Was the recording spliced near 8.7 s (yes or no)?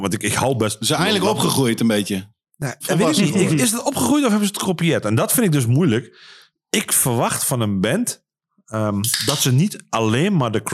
no